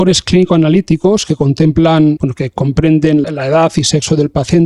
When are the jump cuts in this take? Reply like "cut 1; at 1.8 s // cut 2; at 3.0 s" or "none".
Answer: cut 1; at 2.2 s // cut 2; at 3.2 s